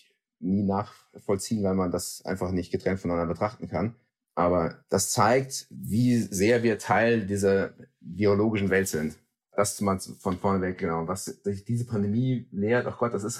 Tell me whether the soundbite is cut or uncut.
uncut